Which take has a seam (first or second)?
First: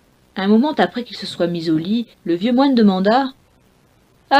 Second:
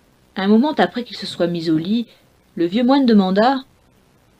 first